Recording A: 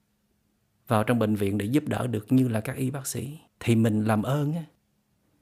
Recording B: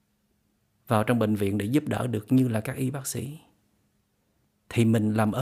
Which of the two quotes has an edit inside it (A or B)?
A